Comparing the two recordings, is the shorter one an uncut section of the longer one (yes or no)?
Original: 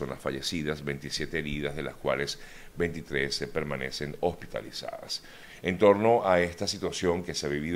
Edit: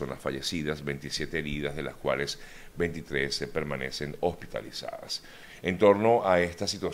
yes